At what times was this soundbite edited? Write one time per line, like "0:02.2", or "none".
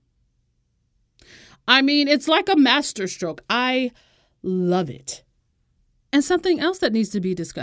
none